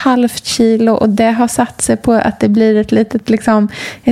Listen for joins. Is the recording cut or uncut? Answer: uncut